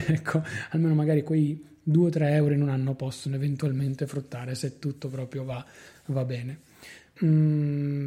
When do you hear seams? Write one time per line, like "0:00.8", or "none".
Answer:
0:07.2